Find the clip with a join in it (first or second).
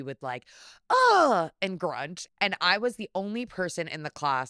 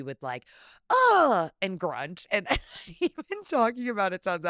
first